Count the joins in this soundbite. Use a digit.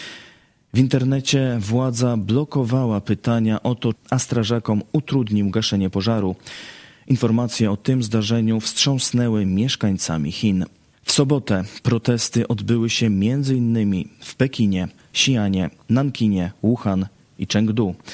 3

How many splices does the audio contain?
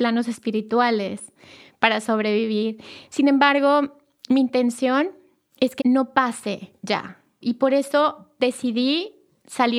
2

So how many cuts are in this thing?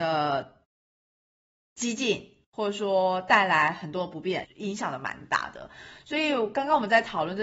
1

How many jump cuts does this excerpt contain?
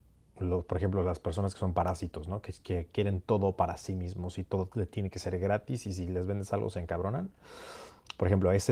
0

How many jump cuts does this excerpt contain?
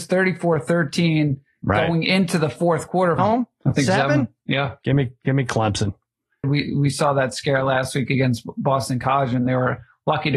2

